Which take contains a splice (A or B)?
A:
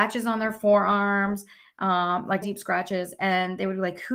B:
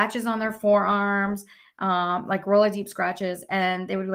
A